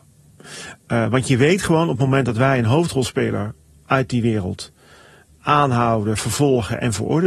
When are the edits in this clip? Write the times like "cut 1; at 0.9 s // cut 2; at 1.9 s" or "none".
cut 1; at 5.3 s